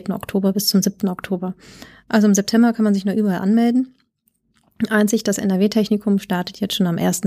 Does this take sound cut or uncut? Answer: uncut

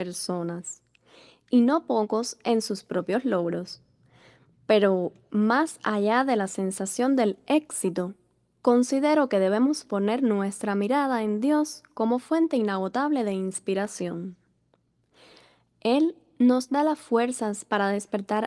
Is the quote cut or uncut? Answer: uncut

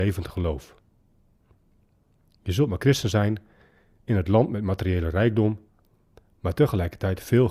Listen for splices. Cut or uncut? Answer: uncut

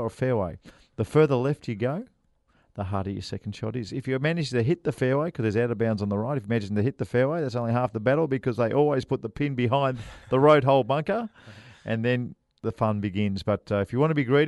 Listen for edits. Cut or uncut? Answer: uncut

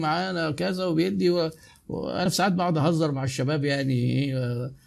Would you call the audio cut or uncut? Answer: uncut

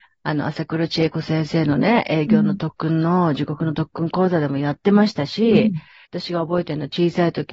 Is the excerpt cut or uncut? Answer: cut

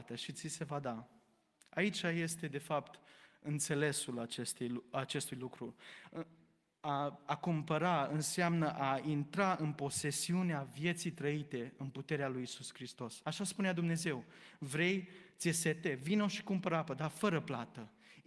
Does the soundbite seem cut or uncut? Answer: cut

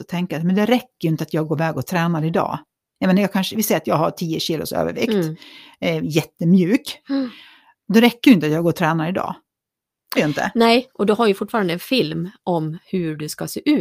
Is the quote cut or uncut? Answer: cut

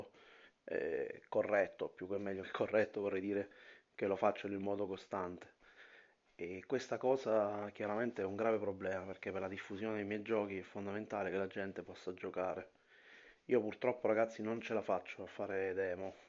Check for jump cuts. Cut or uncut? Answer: cut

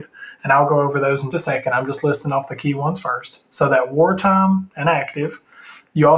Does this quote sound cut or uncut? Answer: cut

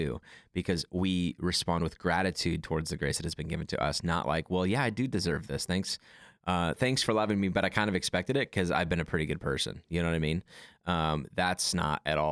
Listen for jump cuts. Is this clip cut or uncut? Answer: uncut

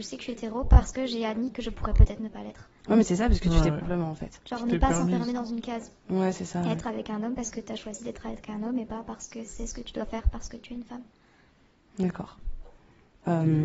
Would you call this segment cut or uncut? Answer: cut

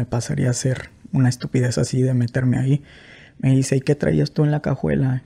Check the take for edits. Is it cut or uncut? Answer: uncut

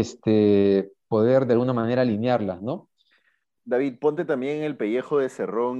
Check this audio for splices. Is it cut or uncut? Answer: cut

